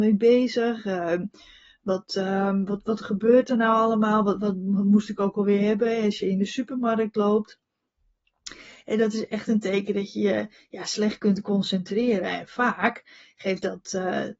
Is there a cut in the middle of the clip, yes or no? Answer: no